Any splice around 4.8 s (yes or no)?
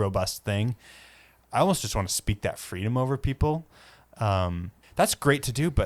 yes